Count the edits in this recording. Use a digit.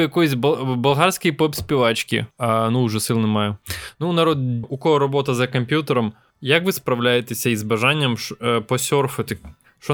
2